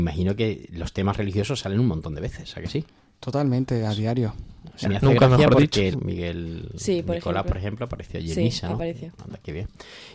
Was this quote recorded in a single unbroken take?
no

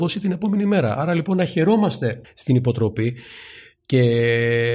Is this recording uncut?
no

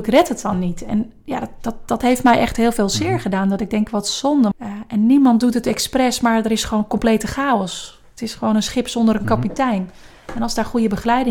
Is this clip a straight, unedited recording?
no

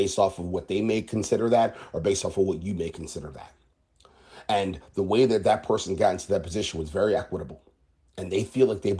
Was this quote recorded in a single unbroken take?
yes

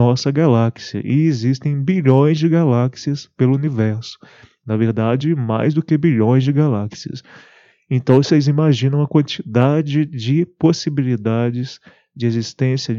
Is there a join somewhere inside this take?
no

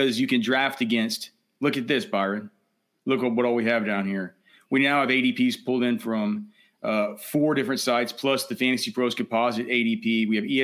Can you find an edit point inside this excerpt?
no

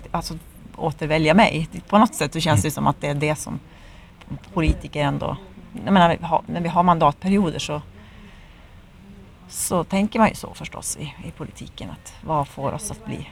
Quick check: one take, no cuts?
yes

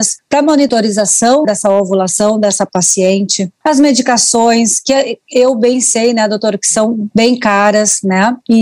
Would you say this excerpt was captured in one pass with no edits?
no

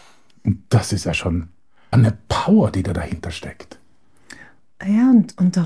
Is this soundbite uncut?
no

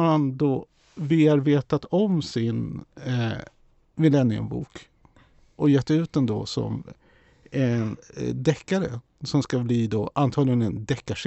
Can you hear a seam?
no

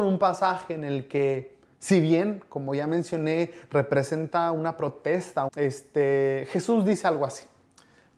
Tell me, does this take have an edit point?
yes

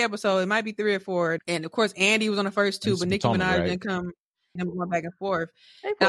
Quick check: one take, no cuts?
no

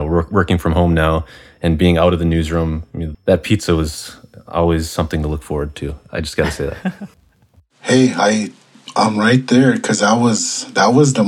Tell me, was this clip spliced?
yes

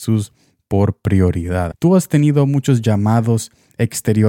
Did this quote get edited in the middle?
yes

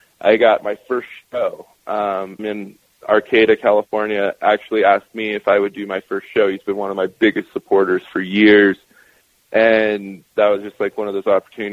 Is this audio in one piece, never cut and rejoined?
no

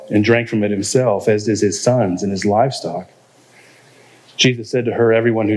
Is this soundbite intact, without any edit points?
yes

